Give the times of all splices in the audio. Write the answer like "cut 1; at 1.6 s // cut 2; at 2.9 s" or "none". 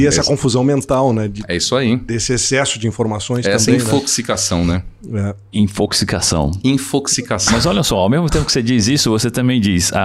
none